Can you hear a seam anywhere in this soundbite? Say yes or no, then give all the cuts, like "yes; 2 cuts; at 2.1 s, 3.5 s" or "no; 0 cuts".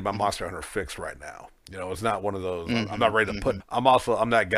yes; 1 cut; at 3.6 s